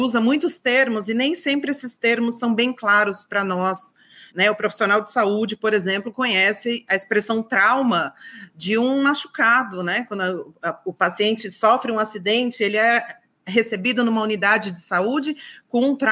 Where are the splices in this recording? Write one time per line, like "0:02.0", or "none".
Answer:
0:04.3